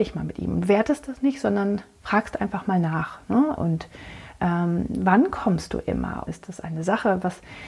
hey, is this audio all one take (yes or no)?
no